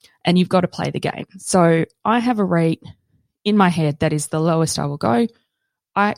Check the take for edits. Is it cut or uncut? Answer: uncut